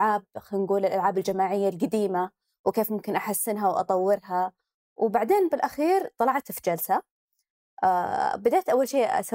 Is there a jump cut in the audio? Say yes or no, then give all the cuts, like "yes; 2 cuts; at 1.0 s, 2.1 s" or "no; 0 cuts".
no; 0 cuts